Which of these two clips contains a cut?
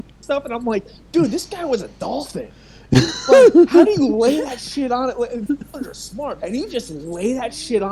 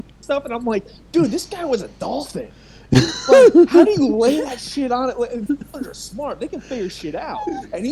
first; 1 cut; at 6.4 s

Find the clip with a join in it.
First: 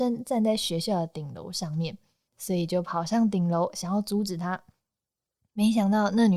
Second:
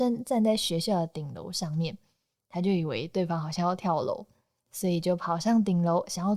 first; 1 cut; at 2.3 s

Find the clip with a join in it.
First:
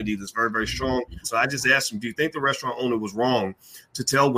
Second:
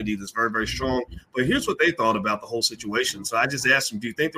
first; 1 cut; at 1.2 s

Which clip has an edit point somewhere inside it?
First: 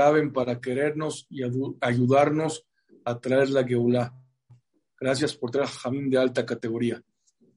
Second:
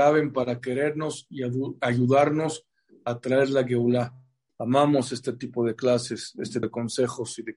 second; 2 cuts; at 4.5 s, 6.6 s

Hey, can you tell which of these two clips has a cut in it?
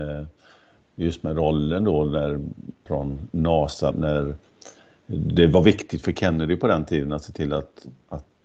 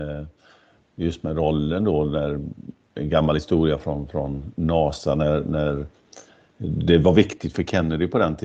first; 2 cuts; at 2.9 s, 3.9 s

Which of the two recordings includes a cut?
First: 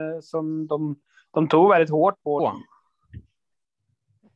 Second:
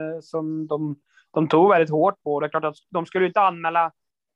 first; 1 cut; at 2.4 s

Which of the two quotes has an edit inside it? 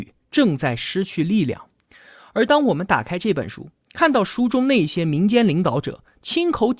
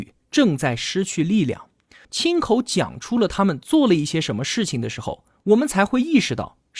second; 1 cut; at 2.0 s

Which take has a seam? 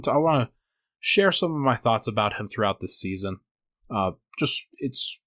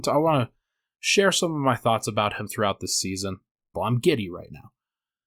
second; 1 cut; at 3.7 s

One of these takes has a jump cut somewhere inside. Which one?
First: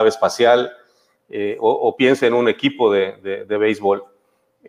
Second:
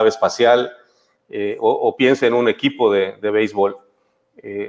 second; 1 cut; at 3.2 s

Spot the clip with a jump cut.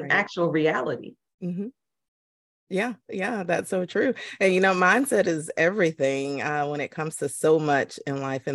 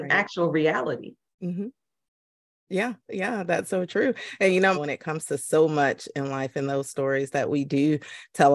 second; 1 cut; at 4.7 s

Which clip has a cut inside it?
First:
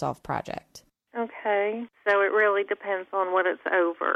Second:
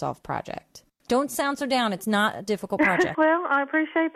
second; 2 cuts; at 1.0 s, 3.1 s

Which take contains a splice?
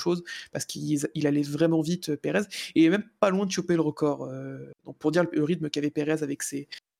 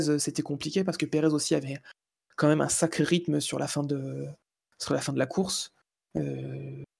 first; 1 cut; at 4.8 s

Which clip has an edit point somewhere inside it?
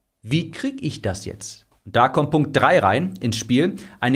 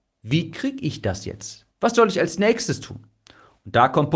first; 1 cut; at 1.7 s

